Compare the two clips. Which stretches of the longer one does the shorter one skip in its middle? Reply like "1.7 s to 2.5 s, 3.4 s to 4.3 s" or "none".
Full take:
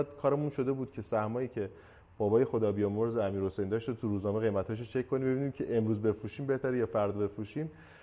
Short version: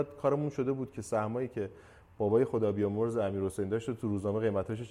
none